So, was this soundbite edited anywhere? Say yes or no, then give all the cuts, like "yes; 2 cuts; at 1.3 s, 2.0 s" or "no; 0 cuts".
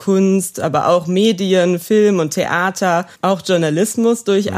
yes; 1 cut; at 3.1 s